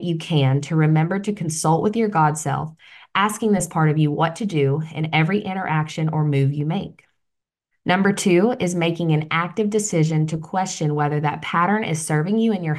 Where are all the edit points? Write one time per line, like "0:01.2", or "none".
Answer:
0:07.7